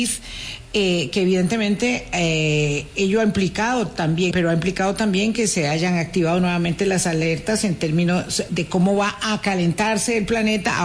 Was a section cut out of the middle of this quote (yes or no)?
yes